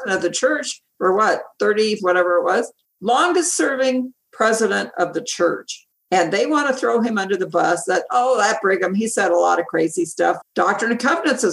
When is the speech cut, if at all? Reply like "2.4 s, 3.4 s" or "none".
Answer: 2.0 s, 10.4 s

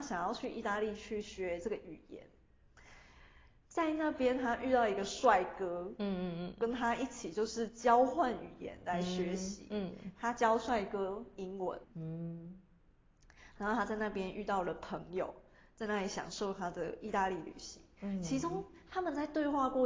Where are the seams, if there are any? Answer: 11.8 s

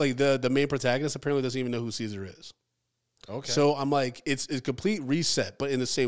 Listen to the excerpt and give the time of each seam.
3.2 s

